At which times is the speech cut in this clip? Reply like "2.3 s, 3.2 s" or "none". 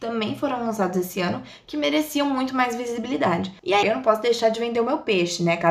3.8 s